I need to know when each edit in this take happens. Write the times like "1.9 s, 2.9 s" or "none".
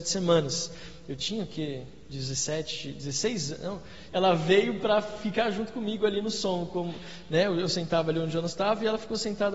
4.1 s